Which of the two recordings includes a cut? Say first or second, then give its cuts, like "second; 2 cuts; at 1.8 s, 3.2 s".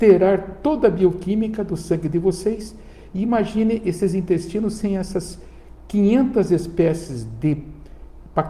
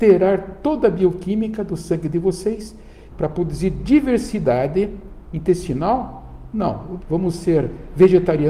second; 2 cuts; at 3.1 s, 7.0 s